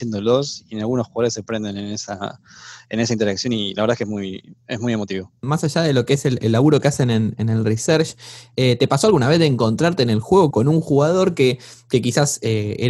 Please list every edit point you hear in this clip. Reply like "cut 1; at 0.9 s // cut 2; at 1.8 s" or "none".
cut 1; at 10.5 s